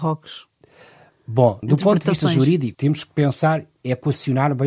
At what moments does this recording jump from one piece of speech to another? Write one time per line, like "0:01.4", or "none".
0:02.7